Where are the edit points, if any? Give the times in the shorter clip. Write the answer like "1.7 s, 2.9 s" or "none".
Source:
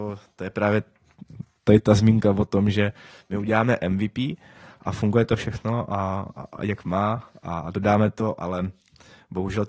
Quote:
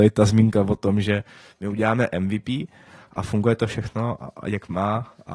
4.2 s